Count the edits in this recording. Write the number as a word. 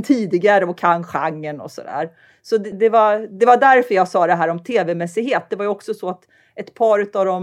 one